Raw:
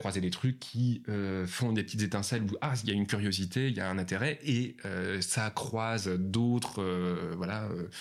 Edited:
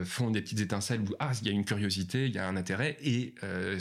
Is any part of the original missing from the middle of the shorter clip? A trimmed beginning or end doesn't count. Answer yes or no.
no